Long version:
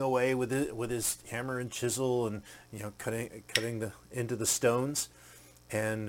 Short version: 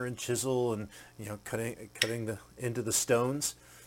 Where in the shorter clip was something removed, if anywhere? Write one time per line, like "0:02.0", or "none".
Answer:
none